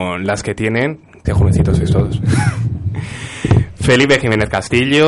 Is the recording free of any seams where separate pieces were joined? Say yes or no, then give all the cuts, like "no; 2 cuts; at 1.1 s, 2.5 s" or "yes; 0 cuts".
no; 1 cut; at 1.2 s